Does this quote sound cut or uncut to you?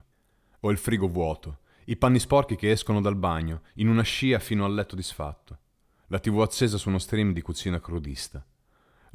uncut